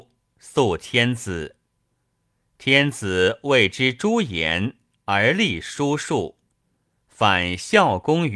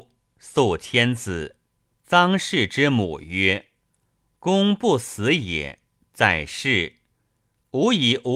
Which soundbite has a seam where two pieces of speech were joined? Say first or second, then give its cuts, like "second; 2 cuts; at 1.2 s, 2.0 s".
second; 1 cut; at 1.9 s